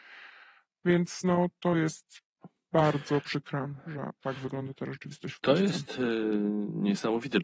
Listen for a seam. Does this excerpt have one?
no; 0 cuts

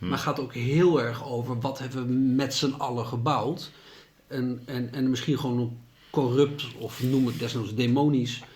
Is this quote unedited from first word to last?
yes; 0 cuts

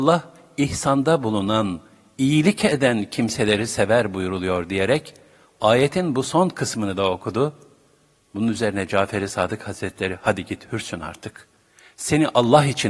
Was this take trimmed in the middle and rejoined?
no; 0 cuts

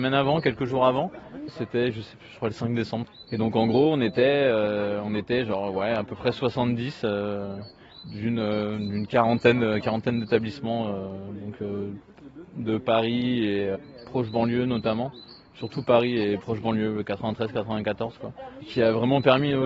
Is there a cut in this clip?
no; 0 cuts

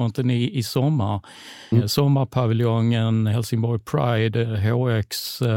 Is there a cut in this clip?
yes; 1 cut; at 1.7 s

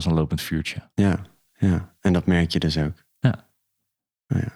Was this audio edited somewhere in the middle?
no; 0 cuts

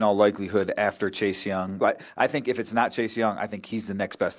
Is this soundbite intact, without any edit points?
no; 1 cut; at 1.8 s

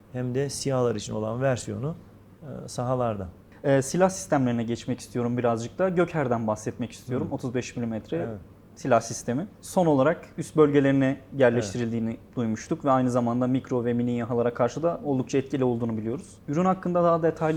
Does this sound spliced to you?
no; 0 cuts

